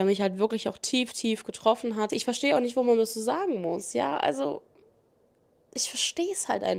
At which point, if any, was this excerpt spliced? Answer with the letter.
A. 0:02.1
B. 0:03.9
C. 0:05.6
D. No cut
A